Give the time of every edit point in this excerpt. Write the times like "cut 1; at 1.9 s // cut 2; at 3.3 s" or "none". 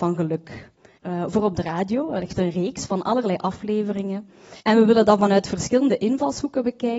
cut 1; at 1.0 s // cut 2; at 4.6 s